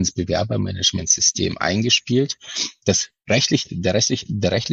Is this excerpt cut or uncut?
uncut